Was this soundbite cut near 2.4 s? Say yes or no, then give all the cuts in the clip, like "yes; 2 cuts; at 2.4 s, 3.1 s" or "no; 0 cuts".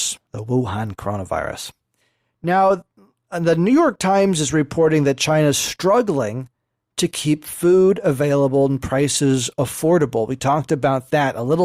no; 0 cuts